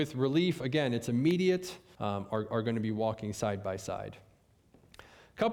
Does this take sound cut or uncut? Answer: cut